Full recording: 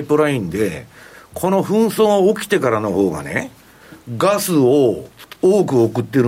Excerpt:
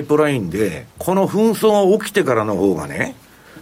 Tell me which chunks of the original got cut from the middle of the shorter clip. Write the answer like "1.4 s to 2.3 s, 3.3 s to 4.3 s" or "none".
0.9 s to 1.3 s